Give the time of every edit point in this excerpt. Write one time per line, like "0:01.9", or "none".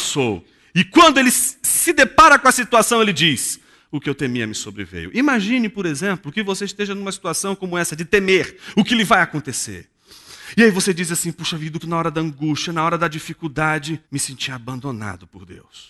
0:11.8
0:14.0